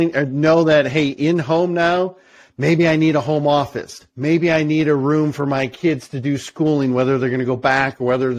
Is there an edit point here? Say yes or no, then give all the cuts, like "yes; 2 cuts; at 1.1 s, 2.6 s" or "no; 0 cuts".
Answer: no; 0 cuts